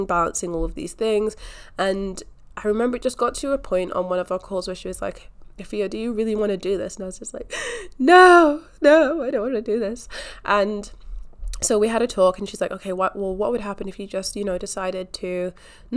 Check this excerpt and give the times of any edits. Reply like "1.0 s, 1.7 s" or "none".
none